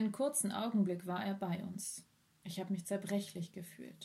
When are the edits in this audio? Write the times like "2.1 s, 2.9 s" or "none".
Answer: 2.4 s